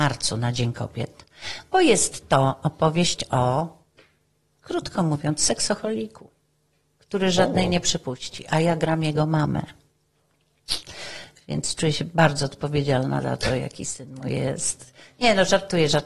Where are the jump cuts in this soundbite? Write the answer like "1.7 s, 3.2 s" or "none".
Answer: none

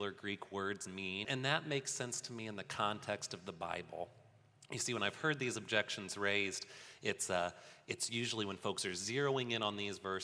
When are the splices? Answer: 1.2 s

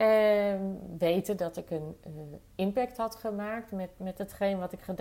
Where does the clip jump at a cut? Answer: none

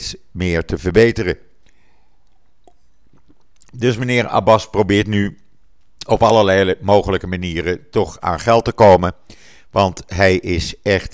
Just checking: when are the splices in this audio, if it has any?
none

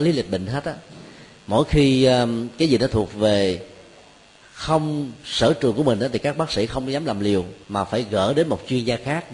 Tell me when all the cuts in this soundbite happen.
7.6 s

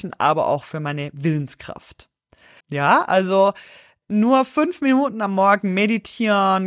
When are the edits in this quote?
2.6 s

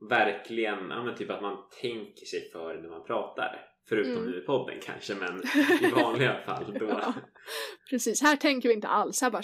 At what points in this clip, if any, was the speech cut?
none

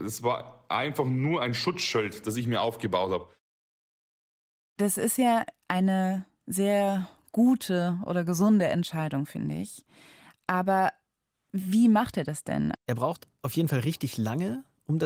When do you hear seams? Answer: 12.7 s

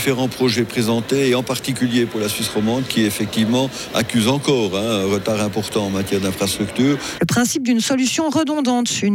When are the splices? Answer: 7.2 s

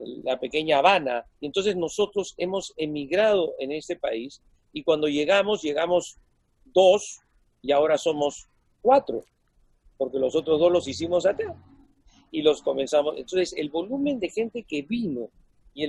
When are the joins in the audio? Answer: 1.3 s

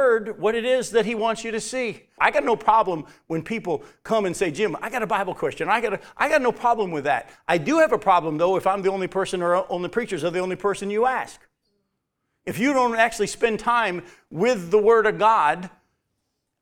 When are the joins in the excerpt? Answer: 2.2 s

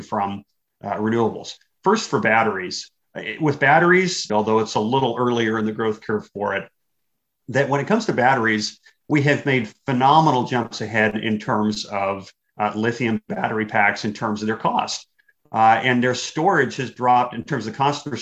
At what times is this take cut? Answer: 4.3 s

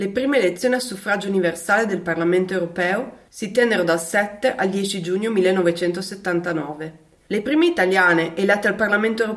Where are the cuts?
7.2 s

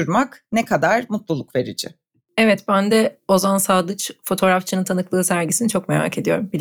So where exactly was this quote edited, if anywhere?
none

